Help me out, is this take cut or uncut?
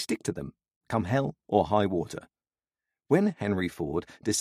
uncut